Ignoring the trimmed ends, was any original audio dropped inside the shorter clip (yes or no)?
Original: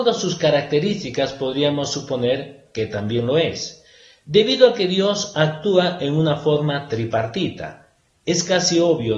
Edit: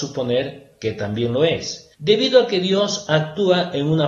yes